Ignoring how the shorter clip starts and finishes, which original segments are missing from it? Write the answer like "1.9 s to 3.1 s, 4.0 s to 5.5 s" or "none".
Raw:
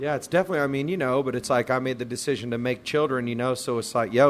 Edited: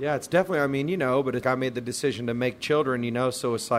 1.4 s to 1.7 s